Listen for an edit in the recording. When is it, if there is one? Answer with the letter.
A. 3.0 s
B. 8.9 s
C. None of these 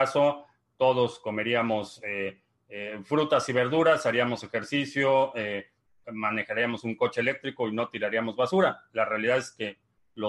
C